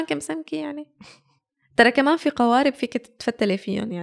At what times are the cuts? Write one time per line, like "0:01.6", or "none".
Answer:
none